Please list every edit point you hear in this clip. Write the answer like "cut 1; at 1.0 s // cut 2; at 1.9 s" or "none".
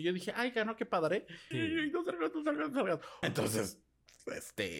cut 1; at 1.5 s // cut 2; at 3.2 s